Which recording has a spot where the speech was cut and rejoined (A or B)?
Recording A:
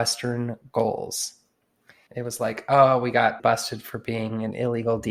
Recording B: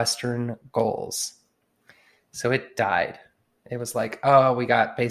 A